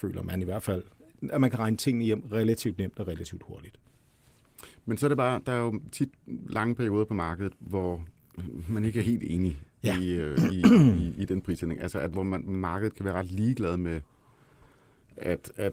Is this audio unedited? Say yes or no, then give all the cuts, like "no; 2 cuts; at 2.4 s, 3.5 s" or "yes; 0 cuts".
yes; 0 cuts